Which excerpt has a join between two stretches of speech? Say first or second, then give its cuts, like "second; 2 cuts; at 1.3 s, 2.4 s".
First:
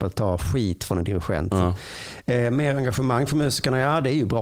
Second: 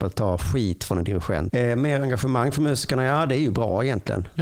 second; 1 cut; at 1.5 s